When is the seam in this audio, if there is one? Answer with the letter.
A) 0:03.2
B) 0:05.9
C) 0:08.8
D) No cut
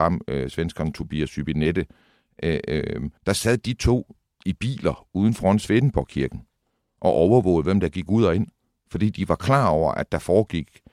A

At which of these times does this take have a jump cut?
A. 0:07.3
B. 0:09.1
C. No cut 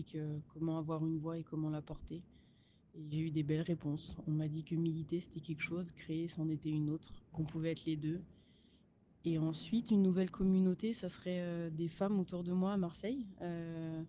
A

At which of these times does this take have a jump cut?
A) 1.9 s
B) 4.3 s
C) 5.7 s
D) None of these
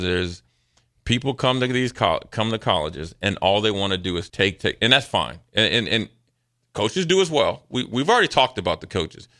B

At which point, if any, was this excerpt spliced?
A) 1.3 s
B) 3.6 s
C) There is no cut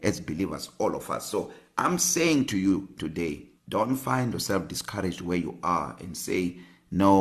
B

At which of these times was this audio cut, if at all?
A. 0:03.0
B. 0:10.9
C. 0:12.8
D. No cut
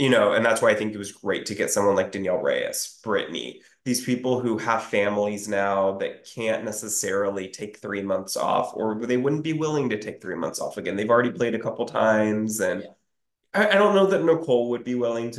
D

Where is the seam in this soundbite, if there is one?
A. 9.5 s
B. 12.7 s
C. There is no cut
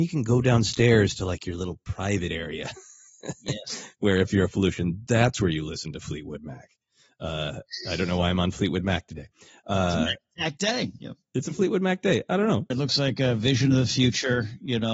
B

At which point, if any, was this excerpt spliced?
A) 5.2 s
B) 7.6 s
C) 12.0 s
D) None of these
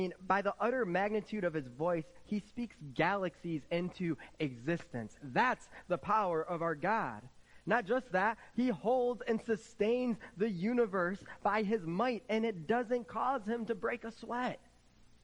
D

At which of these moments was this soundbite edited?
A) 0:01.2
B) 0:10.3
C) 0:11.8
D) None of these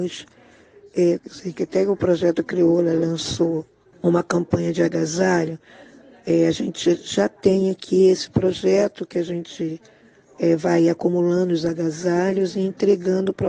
A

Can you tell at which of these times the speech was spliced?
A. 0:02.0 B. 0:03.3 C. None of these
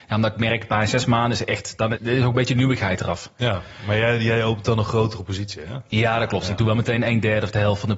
A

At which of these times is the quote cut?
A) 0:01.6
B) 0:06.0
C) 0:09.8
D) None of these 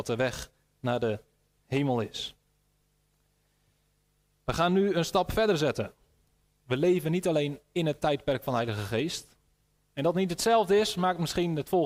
C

